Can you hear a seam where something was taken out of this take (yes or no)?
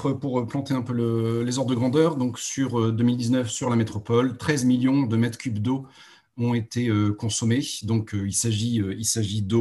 no